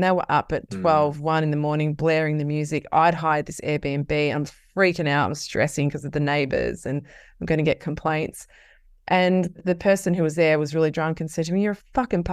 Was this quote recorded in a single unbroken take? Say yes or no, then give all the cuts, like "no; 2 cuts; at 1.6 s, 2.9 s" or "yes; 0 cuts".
yes; 0 cuts